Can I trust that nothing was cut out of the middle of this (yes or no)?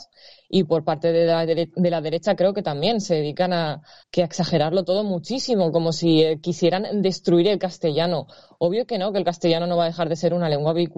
no